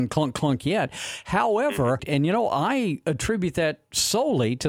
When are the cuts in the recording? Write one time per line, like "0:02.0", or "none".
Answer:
0:02.0